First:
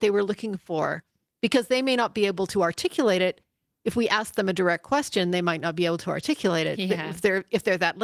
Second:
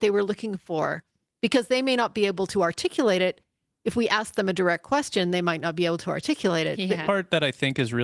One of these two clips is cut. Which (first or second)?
second